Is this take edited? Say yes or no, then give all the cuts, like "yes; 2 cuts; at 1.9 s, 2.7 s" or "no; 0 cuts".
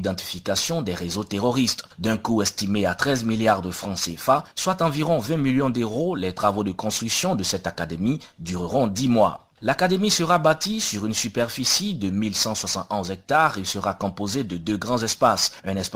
no; 0 cuts